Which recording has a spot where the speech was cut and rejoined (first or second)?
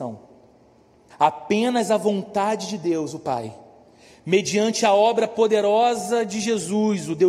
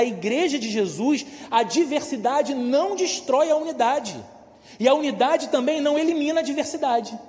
first